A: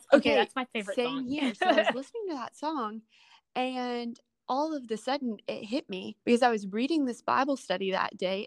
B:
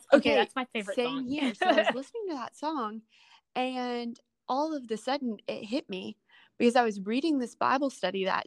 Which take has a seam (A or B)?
A